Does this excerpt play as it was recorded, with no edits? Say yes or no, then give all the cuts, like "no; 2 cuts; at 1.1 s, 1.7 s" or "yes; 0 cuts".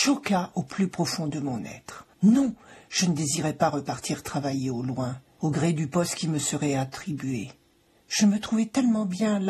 no; 1 cut; at 2.1 s